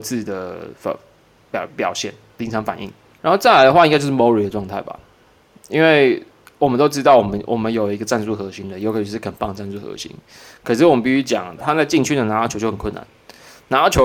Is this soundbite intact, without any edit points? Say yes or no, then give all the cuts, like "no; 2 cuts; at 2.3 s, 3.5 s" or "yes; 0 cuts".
no; 3 cuts; at 1.7 s, 3.2 s, 11.6 s